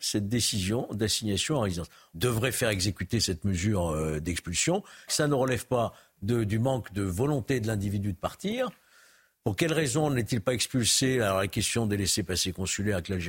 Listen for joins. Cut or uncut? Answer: cut